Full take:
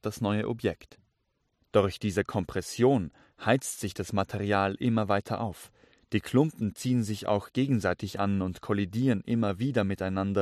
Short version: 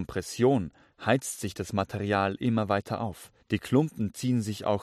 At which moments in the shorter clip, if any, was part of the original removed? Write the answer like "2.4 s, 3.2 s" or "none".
3.4 s